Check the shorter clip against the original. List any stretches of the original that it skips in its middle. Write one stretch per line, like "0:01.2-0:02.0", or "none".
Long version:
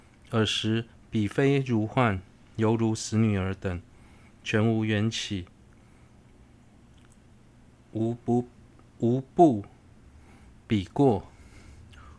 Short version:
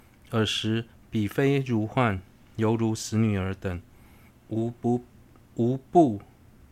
0:04.3-0:07.7